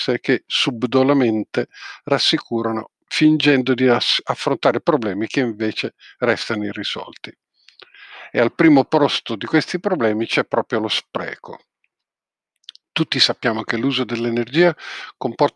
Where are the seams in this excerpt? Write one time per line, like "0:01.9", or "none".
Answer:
none